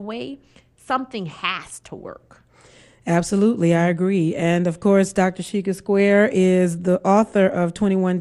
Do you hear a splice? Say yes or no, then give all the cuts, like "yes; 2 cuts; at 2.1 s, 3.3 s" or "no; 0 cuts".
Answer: no; 0 cuts